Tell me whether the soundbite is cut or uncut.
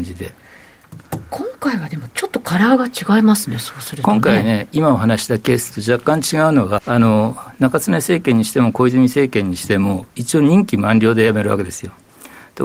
cut